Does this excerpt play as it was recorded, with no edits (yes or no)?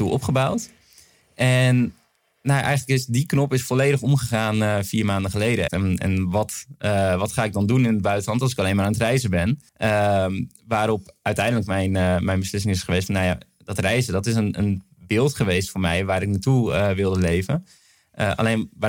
no